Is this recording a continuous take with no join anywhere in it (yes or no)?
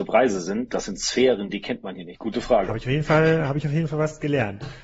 no